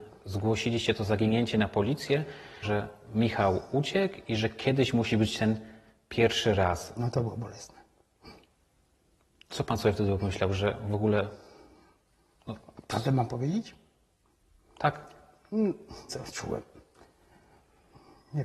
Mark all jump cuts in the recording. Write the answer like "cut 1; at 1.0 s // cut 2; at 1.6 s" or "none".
cut 1; at 2.6 s // cut 2; at 16.1 s